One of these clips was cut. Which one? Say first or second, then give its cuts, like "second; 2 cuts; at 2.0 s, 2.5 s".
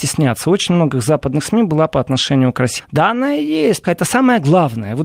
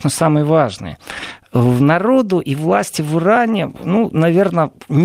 first; 2 cuts; at 2.8 s, 3.8 s